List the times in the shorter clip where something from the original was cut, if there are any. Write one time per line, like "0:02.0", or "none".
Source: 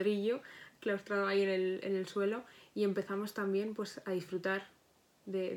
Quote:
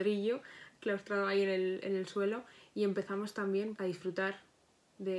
0:03.8

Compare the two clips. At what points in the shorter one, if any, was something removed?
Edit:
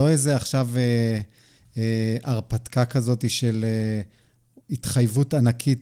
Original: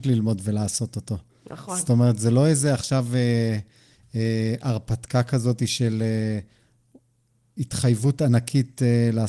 0:04.6

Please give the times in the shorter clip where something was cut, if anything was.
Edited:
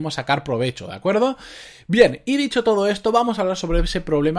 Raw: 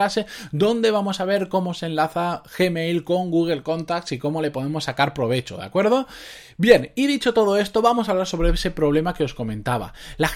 none

